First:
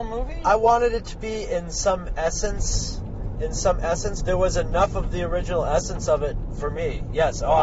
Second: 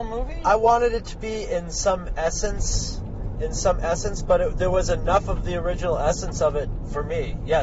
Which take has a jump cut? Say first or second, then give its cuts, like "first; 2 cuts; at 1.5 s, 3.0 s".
first; 1 cut; at 4.2 s